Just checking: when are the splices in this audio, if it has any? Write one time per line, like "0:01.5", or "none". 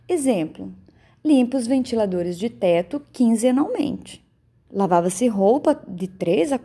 0:04.7